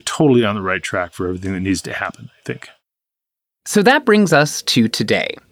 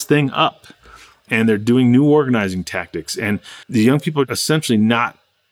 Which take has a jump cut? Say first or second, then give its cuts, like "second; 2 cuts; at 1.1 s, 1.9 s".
second; 1 cut; at 3.6 s